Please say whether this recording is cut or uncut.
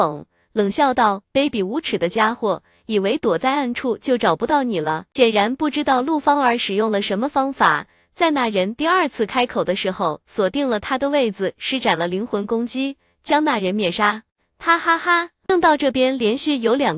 uncut